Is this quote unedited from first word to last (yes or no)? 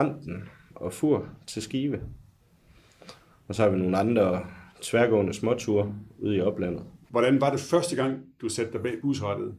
no